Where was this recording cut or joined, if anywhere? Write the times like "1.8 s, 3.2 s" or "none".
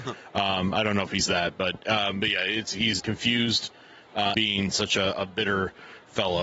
3.0 s, 4.3 s